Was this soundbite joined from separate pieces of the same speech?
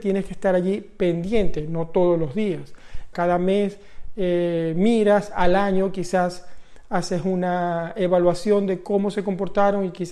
yes; 1 cut; at 3.1 s

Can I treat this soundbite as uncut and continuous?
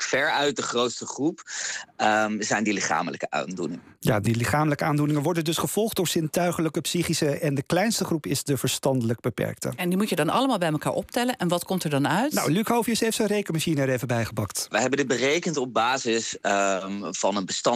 yes; 0 cuts

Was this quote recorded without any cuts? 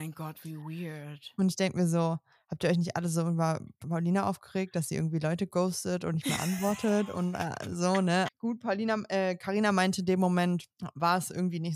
no; 1 cut; at 8.2 s

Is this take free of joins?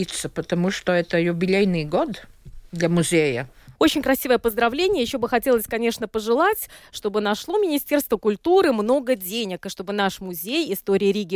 no; 1 cut; at 3.7 s

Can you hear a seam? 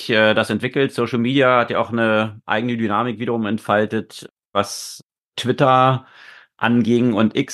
no; 0 cuts

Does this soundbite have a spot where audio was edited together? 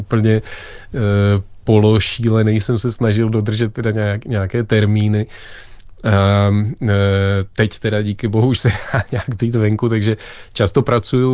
no; 0 cuts

